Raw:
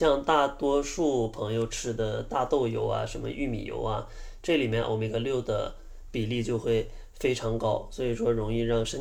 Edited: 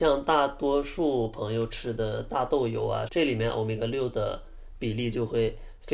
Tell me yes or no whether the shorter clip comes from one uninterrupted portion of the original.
no